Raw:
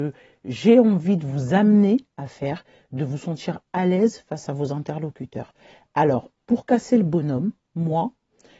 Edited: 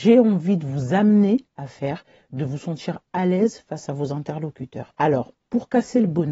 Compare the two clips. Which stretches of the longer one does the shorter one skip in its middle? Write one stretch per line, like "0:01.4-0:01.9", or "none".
0:05.5-0:05.9

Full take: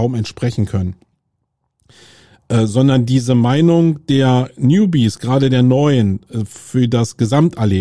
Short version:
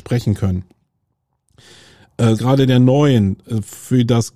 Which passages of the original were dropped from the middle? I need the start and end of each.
0:02.7-0:05.2

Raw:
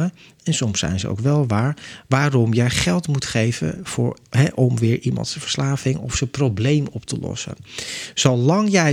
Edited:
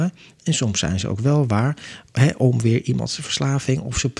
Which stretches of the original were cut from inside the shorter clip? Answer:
0:02.1-0:04.2

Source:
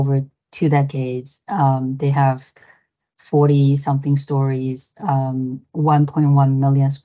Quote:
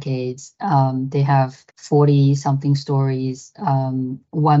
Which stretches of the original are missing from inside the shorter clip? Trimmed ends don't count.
0:02.6-0:03.1

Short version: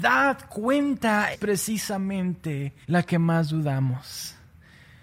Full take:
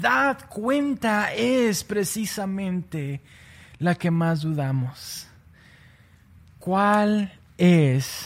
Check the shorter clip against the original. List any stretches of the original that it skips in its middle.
0:01.3-0:01.8
0:03.3-0:03.7

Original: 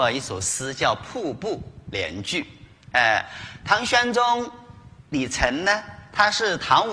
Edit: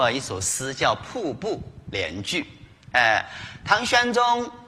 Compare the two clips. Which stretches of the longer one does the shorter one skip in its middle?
none

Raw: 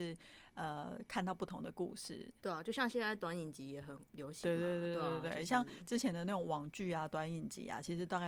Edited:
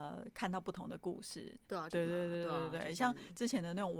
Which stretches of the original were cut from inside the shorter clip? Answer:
0:02.6-0:04.4

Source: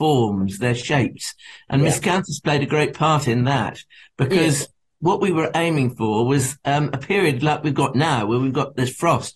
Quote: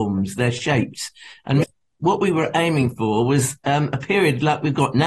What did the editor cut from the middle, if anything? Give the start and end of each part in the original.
0:01.9-0:04.6

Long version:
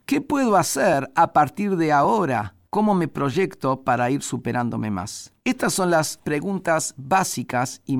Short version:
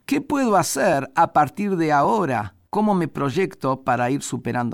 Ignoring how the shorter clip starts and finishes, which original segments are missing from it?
none

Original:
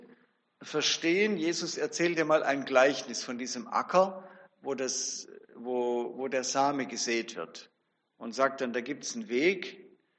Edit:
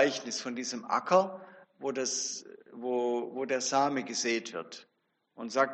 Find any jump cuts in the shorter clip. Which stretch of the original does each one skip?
none

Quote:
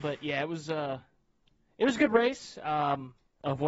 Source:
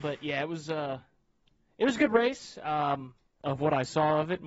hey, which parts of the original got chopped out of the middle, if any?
none

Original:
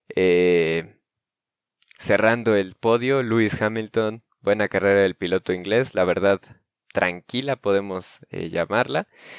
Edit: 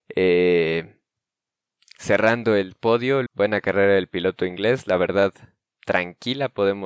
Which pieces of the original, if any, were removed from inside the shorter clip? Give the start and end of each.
0:03.3-0:04.3

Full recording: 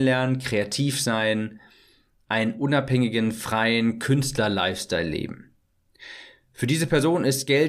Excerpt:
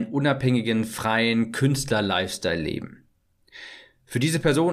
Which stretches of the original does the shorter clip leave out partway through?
none

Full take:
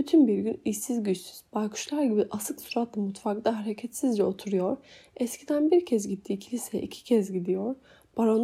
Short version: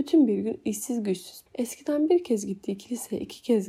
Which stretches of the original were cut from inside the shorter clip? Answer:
0:01.5-0:05.1

